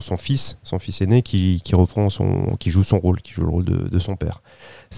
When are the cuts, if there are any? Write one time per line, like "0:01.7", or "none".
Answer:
none